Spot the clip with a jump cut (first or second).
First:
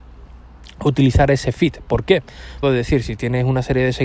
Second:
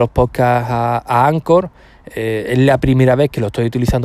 first